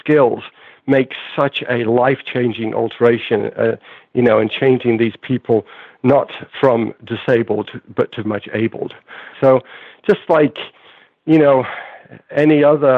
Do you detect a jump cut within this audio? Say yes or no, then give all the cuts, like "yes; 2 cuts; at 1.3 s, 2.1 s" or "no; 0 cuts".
yes; 2 cuts; at 8.2 s, 9.3 s